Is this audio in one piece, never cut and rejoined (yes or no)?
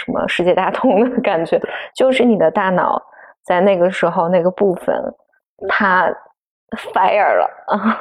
yes